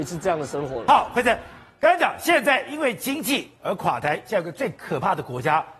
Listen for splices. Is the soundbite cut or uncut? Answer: uncut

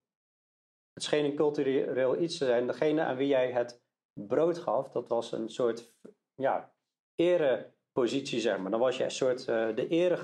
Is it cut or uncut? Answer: uncut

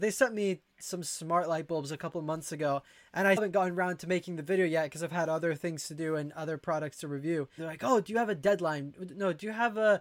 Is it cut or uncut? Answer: cut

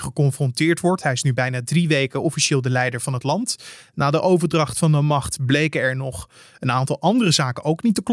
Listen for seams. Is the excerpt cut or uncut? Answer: uncut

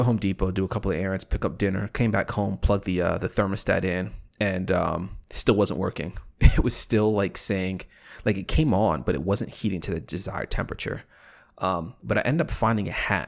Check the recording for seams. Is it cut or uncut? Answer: uncut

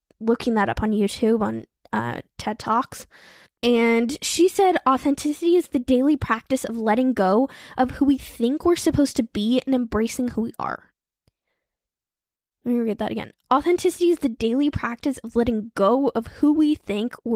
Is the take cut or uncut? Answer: cut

